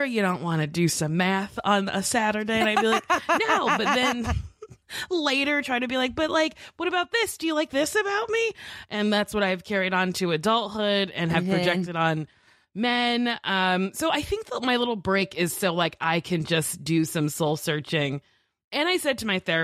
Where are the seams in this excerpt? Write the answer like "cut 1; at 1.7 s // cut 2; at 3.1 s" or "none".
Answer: none